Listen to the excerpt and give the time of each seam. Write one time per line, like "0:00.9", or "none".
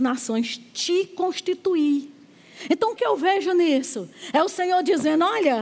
0:03.0